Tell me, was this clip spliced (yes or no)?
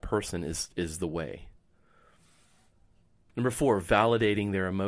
yes